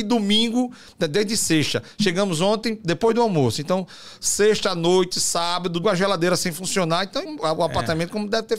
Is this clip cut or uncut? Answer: cut